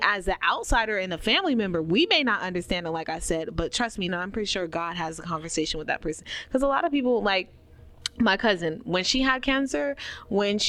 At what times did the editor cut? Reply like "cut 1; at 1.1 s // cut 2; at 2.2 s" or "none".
cut 1; at 4.1 s

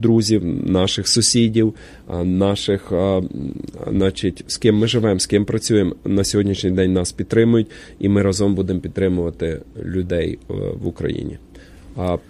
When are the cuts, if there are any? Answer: none

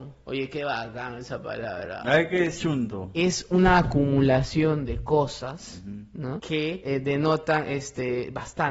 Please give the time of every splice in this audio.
none

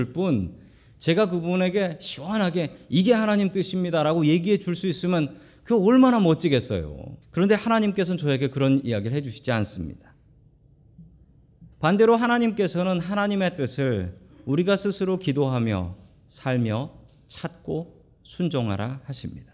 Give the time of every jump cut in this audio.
cut 1; at 7.2 s // cut 2; at 11.7 s

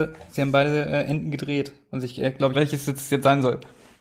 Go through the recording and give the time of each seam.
cut 1; at 2.5 s

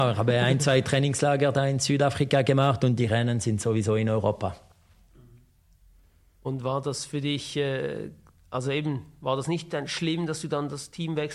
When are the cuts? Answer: none

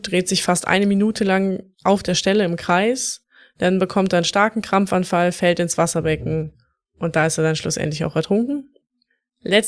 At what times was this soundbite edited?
cut 1; at 1.7 s

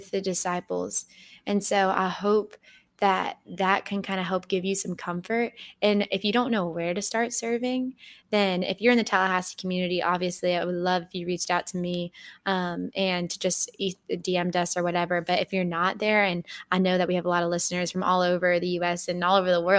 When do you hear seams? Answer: none

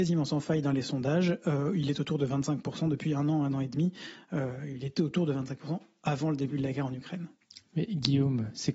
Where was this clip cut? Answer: none

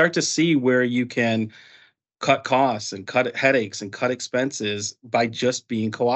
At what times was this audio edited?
none

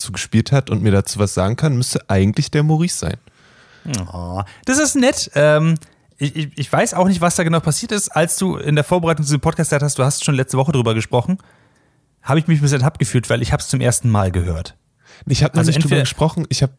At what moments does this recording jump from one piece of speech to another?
none

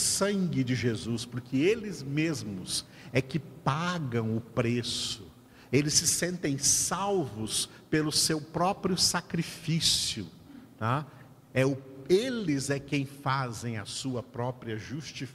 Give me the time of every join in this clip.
none

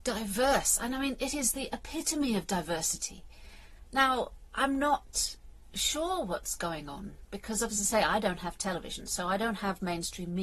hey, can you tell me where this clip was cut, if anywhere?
cut 1; at 3.9 s

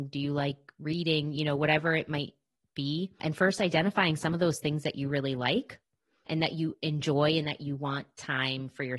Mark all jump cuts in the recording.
none

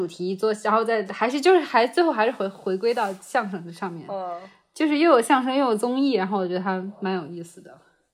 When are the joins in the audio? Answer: none

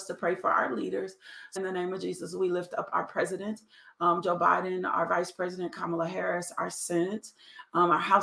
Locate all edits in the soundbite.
cut 1; at 1.6 s

